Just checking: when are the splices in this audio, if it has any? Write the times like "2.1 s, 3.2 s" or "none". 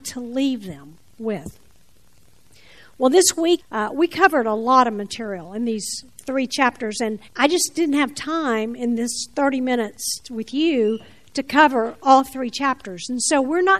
3.6 s, 7.3 s